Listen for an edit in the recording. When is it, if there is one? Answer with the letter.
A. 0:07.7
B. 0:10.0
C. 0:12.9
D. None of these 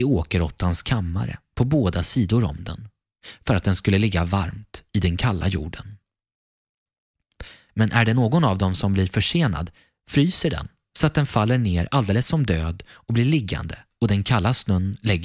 A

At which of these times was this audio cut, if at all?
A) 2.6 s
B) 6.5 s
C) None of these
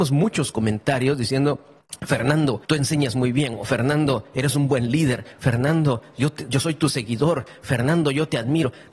A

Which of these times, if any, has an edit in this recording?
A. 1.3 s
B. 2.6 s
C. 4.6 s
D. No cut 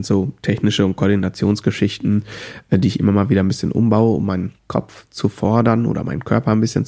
C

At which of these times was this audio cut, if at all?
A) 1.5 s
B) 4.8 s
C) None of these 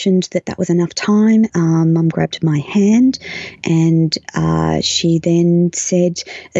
A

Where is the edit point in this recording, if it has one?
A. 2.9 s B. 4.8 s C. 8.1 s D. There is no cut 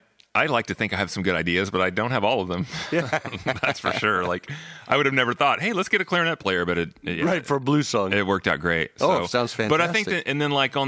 D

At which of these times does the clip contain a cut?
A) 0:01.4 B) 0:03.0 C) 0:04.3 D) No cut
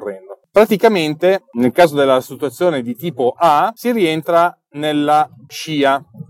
D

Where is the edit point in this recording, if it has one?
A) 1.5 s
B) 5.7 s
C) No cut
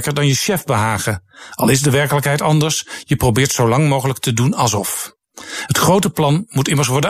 C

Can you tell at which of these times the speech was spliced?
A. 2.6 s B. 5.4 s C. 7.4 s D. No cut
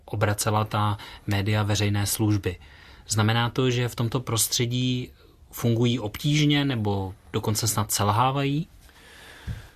D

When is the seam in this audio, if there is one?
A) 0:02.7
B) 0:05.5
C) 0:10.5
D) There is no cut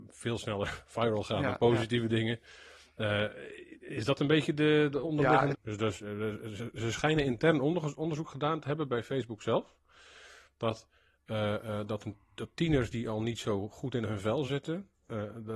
B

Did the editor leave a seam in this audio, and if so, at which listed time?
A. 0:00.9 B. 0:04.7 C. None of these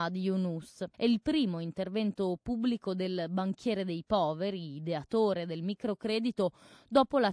A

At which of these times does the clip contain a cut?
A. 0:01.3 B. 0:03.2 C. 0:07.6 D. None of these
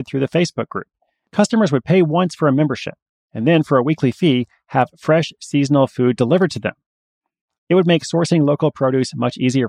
A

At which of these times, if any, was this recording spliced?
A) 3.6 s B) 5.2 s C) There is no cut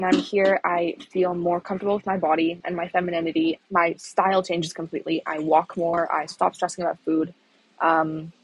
A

